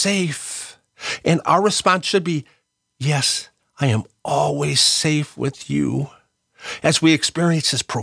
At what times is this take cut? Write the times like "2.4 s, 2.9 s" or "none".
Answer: 3.6 s